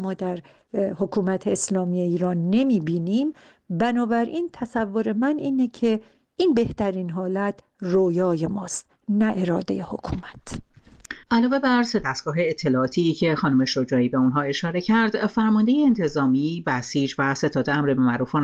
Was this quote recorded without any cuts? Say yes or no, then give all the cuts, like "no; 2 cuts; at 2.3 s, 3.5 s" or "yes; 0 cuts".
no; 1 cut; at 11.2 s